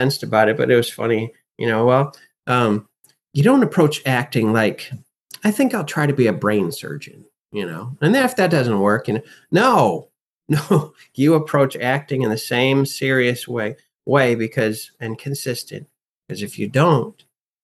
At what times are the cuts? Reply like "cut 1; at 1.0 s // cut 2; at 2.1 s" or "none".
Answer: none